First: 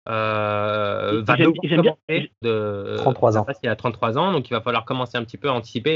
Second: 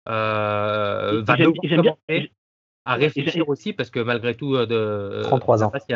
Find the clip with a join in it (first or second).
first